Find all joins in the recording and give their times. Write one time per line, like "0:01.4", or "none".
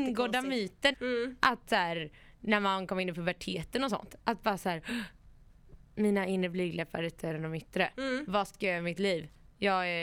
0:00.9